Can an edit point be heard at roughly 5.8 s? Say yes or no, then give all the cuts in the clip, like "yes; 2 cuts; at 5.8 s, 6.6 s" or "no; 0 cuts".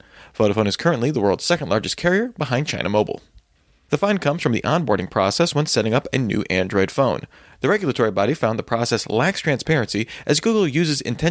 no; 1 cut; at 3.9 s